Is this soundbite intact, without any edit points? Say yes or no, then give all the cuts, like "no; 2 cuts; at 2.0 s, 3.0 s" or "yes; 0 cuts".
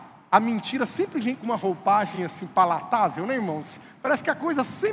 yes; 0 cuts